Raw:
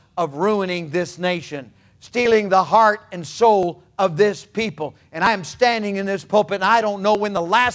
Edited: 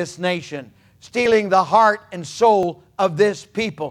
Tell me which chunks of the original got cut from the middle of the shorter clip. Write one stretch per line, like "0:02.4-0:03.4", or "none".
none